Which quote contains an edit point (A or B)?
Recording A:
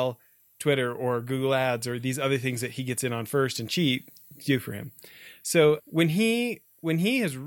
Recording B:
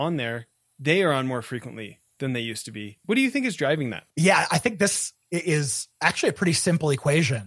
B